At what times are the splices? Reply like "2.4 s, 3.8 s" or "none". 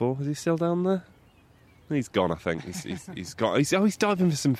none